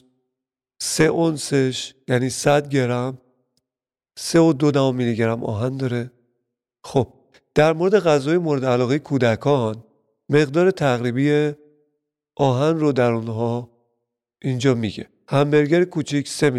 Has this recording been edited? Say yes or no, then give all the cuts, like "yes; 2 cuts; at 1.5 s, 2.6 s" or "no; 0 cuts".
no; 0 cuts